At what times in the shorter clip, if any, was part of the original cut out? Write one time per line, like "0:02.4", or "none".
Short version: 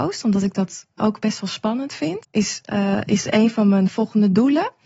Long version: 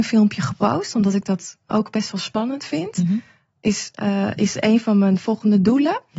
0:02.2